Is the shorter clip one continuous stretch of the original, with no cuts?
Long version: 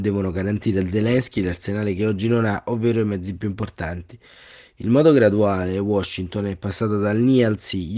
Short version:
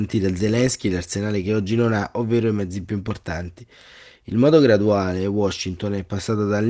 yes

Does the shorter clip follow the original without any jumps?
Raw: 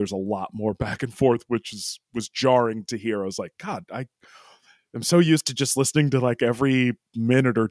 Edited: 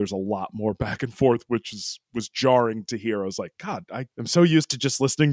no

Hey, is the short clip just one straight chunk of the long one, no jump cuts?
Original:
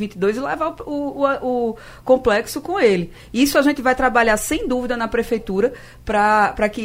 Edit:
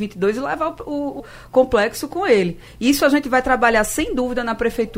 no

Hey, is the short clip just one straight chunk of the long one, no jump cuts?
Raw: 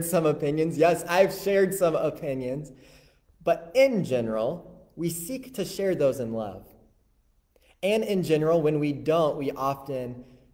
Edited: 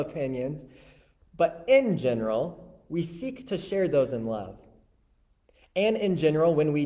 yes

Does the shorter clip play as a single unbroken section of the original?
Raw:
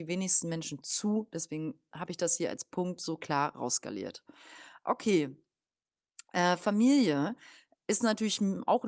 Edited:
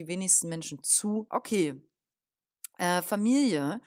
no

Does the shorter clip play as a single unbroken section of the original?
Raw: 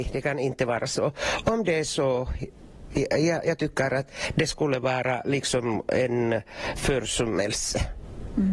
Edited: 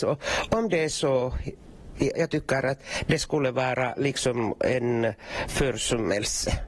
no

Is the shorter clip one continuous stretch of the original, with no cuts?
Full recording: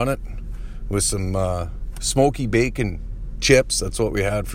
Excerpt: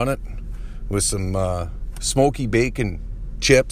yes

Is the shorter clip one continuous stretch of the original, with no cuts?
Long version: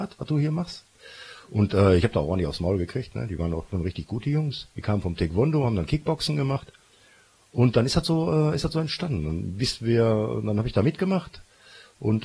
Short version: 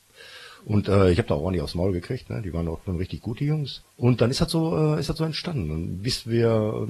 no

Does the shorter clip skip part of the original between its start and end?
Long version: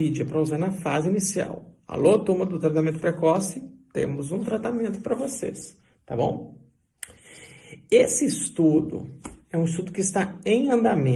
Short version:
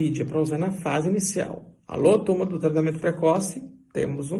no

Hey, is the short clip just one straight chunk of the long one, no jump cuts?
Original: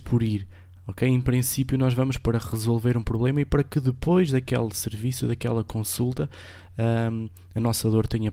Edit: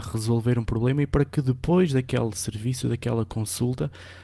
yes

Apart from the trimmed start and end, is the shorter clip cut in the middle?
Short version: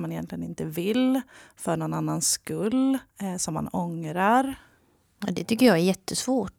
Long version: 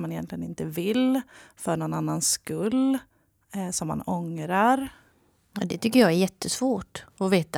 yes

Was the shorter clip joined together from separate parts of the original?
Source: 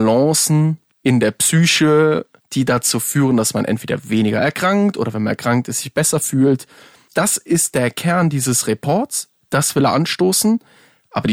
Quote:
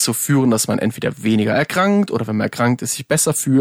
no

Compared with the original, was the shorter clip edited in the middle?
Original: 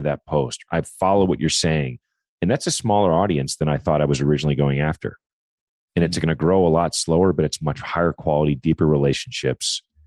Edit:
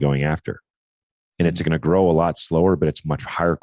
no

